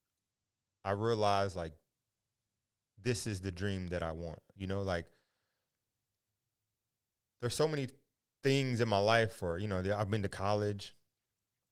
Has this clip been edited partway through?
no; 0 cuts

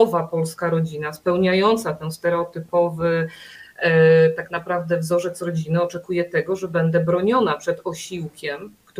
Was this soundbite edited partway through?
no; 0 cuts

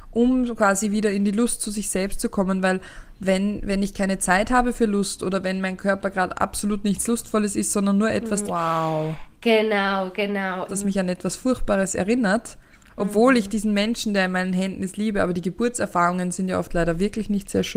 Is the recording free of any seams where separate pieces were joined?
no; 2 cuts; at 8.5 s, 10.7 s

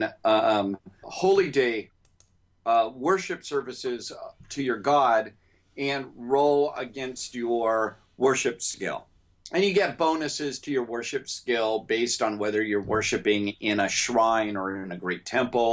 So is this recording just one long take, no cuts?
no; 1 cut; at 1.0 s

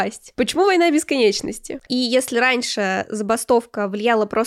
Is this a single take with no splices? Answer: no; 1 cut; at 1.9 s

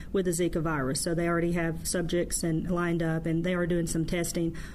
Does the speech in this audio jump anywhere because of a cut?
no; 0 cuts

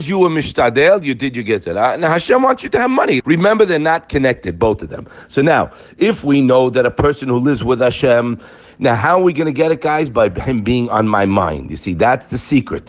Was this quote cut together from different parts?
yes; 1 cut; at 3.2 s

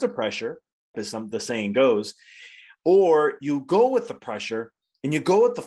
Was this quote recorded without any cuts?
no; 1 cut; at 0.9 s

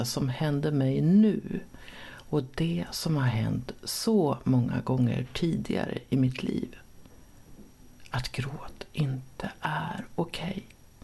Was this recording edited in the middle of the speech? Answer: no; 0 cuts

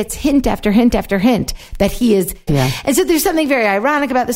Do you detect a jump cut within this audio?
yes; 1 cut; at 2.5 s

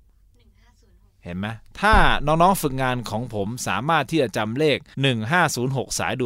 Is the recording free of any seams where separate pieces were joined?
no; 1 cut; at 4.9 s

